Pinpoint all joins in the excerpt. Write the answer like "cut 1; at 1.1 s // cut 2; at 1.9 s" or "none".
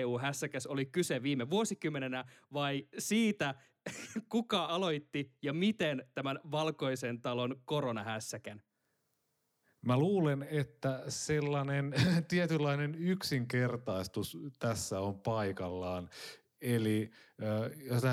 cut 1; at 4.7 s